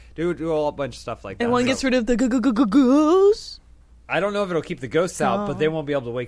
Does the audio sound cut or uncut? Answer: uncut